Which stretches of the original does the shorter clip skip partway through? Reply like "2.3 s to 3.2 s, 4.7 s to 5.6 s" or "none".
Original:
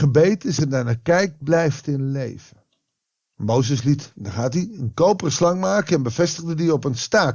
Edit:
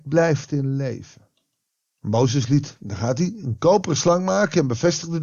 none